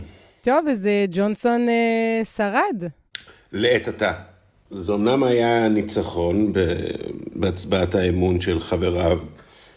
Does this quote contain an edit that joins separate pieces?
yes; 1 cut; at 4.7 s

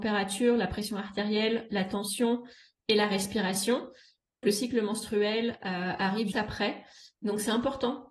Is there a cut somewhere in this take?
yes; 2 cuts; at 4.4 s, 6.3 s

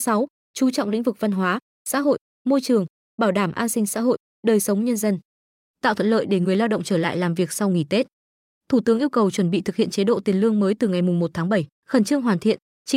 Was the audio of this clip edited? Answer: yes; 1 cut; at 11.7 s

